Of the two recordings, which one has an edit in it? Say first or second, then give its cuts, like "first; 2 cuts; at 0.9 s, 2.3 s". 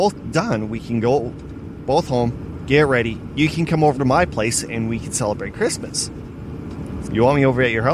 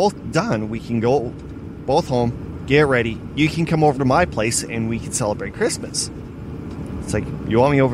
first; 1 cut; at 7.0 s